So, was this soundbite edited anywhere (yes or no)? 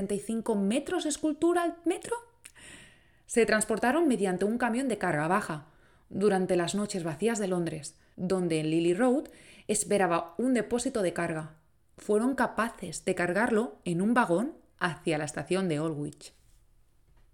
yes